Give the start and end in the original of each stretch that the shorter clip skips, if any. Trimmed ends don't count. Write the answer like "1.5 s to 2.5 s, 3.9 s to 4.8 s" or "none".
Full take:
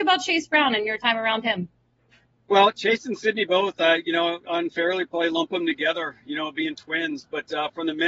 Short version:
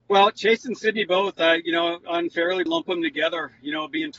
5.1 s to 5.3 s